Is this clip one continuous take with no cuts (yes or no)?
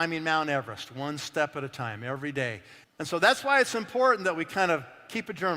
no